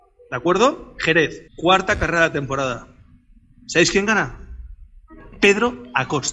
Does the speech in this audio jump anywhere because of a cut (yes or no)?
yes